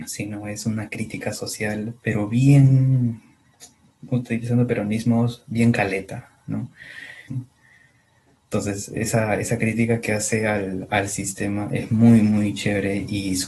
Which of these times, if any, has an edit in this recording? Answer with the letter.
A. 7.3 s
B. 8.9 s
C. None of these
A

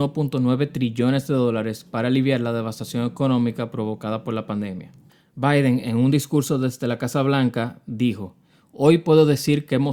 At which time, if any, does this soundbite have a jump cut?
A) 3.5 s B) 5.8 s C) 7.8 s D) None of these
D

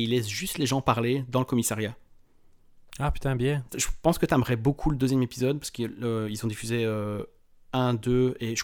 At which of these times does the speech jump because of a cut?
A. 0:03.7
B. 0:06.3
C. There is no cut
A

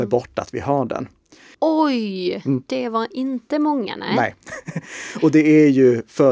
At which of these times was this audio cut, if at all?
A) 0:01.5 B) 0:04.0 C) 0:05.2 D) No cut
A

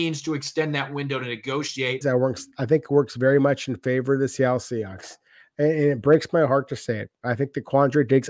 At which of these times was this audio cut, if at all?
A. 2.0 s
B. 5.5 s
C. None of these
A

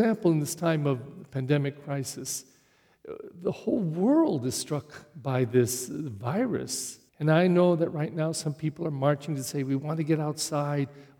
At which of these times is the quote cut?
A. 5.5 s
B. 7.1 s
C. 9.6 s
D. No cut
B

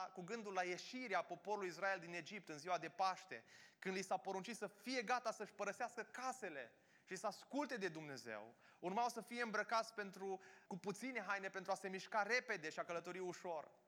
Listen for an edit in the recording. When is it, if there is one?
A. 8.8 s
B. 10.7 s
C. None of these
B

